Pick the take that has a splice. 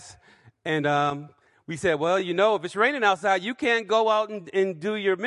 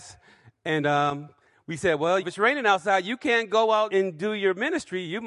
second; 2 cuts; at 2.2 s, 3.9 s

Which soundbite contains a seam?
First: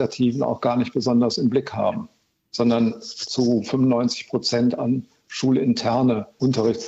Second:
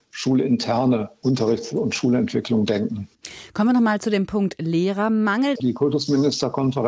second; 1 cut; at 5.6 s

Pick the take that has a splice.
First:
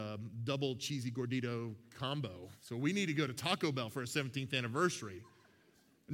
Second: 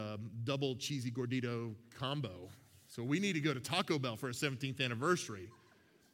first; 1 cut; at 2.6 s

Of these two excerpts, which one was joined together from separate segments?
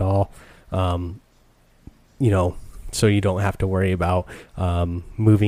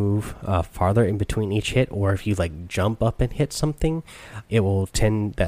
second; 1 cut; at 4.4 s

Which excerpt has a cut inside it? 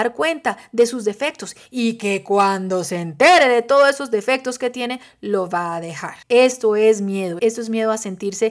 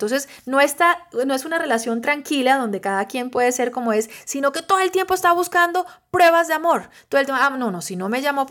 first; 2 cuts; at 6.2 s, 7.4 s

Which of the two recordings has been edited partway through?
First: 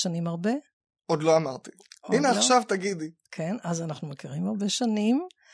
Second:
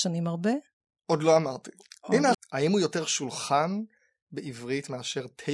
second; 1 cut; at 2.3 s

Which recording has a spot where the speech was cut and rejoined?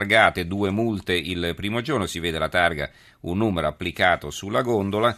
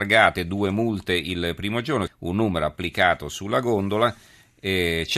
second; 1 cut; at 2.1 s

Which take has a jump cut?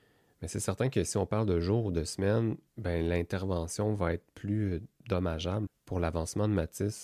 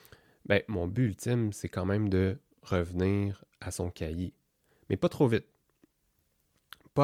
first; 2 cuts; at 2.7 s, 5.7 s

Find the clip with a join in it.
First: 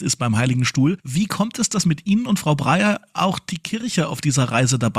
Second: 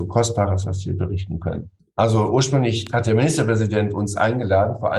second; 1 cut; at 1.8 s

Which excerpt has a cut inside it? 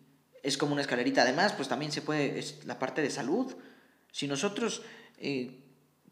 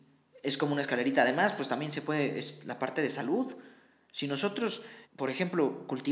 second; 1 cut; at 5.0 s

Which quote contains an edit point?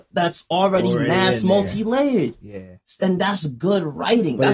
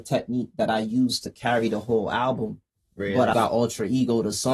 second; 1 cut; at 3.3 s

